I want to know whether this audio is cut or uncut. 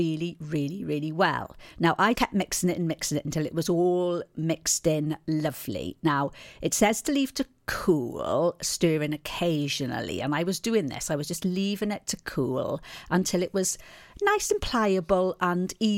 cut